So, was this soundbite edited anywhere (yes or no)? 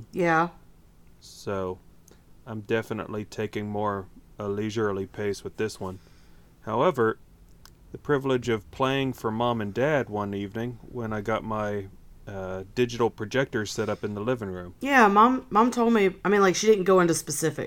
yes